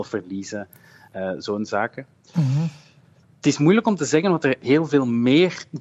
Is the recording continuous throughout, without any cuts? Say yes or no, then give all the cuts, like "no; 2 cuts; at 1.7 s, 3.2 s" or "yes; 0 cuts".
yes; 0 cuts